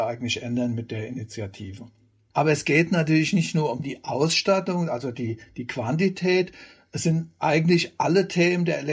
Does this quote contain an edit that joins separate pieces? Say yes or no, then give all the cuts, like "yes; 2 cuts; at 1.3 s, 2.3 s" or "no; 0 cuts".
no; 0 cuts